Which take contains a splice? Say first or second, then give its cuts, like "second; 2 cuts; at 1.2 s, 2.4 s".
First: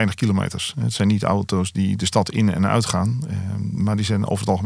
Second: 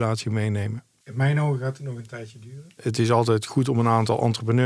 second; 1 cut; at 1.0 s